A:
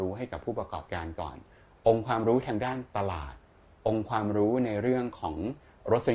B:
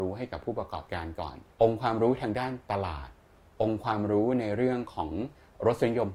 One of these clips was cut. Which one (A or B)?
B